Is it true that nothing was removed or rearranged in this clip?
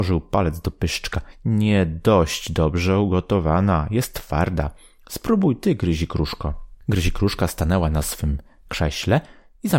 yes; 0 cuts

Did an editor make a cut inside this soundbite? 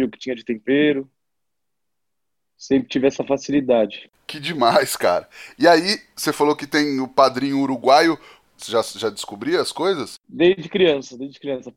yes; 1 cut; at 8.5 s

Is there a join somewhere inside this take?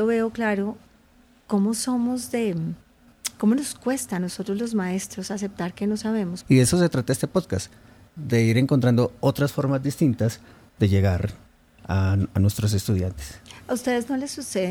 yes; 1 cut; at 6.4 s

